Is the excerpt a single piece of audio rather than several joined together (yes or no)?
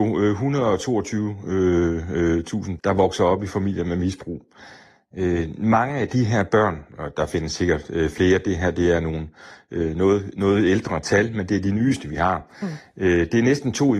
no